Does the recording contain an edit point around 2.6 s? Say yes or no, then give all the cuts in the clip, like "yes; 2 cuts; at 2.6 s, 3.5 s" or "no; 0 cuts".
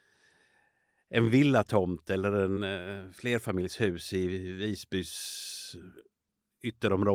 yes; 1 cut; at 2.6 s